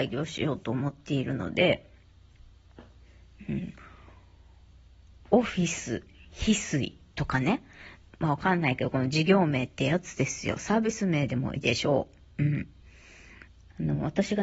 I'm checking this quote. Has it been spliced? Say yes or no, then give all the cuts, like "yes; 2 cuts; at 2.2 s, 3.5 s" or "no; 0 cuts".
yes; 1 cut; at 11.6 s